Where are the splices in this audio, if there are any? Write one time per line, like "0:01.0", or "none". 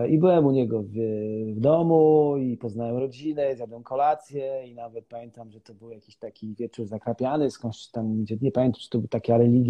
none